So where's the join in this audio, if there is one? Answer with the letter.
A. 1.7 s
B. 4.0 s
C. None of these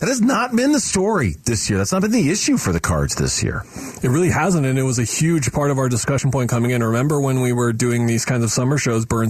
C